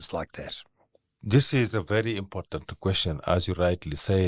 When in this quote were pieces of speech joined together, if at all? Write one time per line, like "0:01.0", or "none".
none